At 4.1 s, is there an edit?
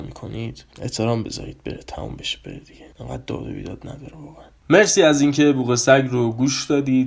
no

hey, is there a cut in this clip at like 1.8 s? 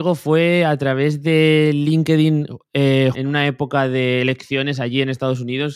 no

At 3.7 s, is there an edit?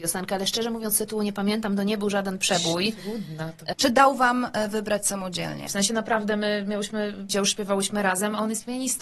yes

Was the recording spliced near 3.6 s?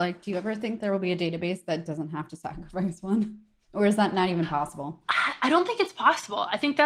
no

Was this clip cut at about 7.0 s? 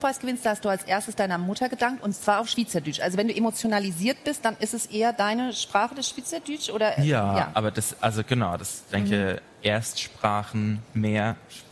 no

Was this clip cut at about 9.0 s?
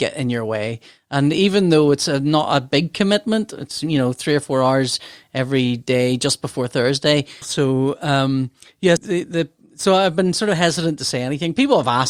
yes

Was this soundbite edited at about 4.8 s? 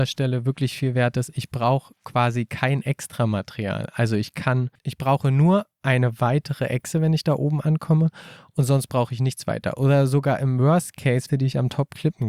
yes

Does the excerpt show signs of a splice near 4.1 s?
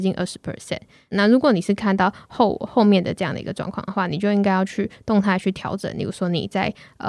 no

